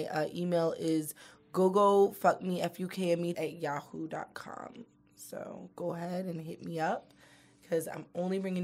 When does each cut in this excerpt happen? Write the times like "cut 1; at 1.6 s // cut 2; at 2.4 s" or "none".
cut 1; at 3.3 s

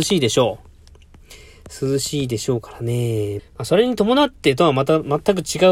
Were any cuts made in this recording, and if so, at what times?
cut 1; at 3.4 s

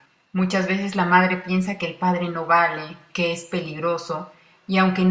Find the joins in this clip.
cut 1; at 3.1 s

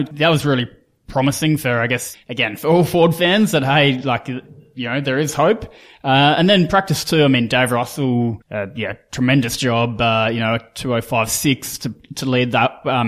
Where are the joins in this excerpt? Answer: cut 1; at 2.1 s // cut 2; at 8.4 s

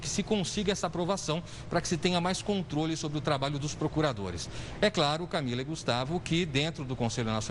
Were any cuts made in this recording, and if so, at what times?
none

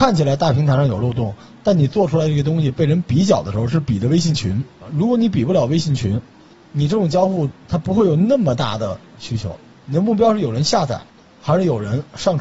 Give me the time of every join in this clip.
none

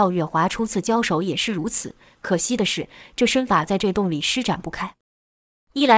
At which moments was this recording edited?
none

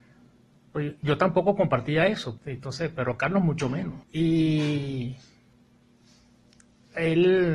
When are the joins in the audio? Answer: cut 1; at 2.4 s // cut 2; at 4.0 s

